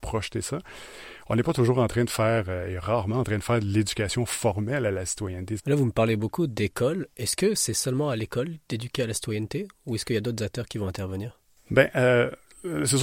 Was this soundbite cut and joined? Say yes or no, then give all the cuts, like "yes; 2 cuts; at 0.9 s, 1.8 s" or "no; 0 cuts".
yes; 1 cut; at 5.6 s